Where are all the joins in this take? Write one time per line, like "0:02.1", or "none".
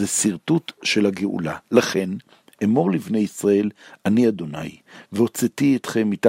none